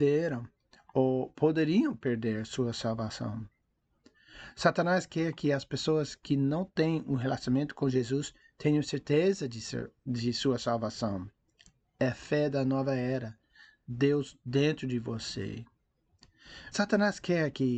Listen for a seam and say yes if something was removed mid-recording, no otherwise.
yes